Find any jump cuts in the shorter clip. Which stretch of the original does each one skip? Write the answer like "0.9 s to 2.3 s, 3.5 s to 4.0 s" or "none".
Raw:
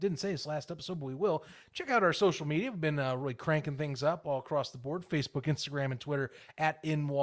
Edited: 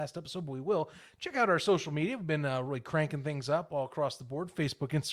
none